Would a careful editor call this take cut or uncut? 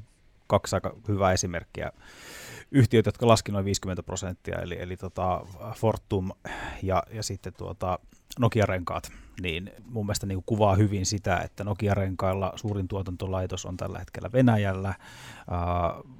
cut